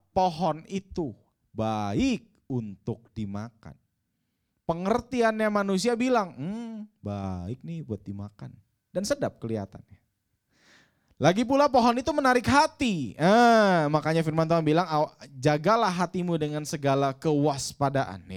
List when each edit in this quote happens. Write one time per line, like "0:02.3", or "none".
none